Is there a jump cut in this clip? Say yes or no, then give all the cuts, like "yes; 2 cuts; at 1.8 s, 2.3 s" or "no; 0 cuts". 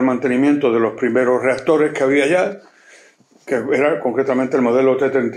no; 0 cuts